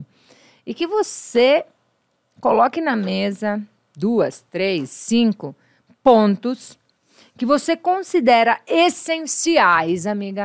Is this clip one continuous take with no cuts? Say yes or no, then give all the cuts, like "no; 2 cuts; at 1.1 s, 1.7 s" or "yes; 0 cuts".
yes; 0 cuts